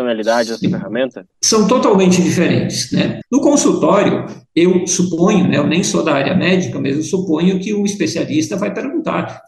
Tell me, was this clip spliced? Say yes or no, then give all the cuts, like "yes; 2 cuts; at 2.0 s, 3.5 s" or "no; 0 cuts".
yes; 2 cuts; at 1.3 s, 3.2 s